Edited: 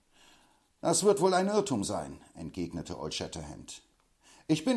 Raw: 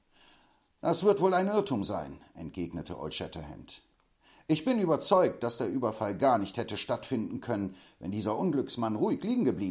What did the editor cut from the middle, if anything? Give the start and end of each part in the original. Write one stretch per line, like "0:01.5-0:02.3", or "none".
none